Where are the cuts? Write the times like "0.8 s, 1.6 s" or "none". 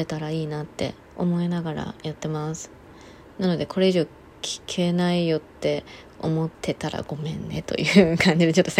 1.0 s, 6.5 s